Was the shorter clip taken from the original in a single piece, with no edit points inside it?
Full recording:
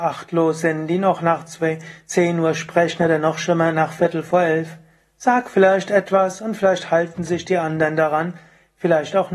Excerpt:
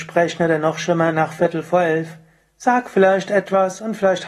yes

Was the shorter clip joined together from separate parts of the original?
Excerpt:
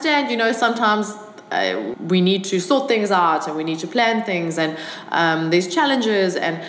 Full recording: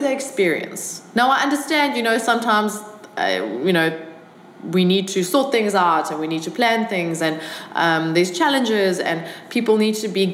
yes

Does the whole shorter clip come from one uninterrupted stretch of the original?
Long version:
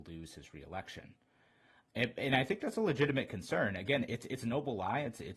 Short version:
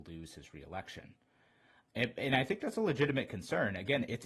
yes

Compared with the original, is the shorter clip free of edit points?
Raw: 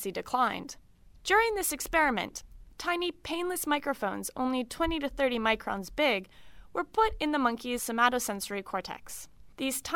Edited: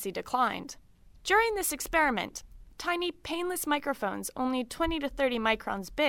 yes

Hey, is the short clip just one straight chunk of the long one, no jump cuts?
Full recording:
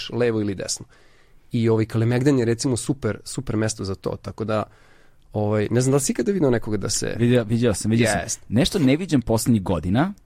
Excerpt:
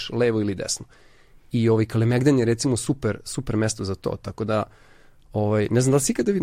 yes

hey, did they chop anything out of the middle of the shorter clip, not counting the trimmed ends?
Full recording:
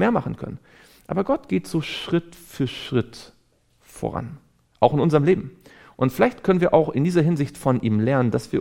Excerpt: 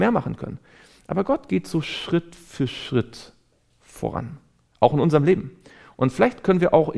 no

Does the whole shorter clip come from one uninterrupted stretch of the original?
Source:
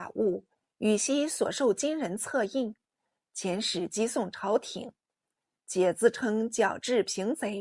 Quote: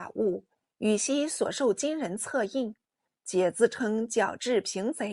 no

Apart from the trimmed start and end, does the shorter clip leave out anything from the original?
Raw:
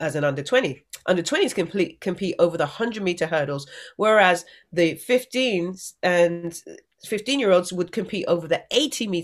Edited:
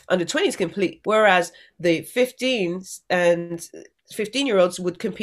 yes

